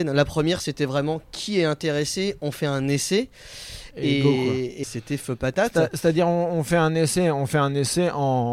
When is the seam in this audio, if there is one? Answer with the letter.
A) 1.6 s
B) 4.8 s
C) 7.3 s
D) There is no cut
B